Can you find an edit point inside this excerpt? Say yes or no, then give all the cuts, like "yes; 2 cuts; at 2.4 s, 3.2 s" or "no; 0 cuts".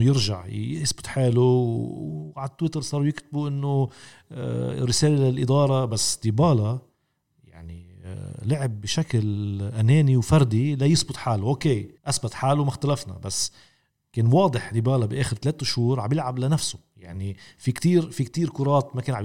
yes; 1 cut; at 12.0 s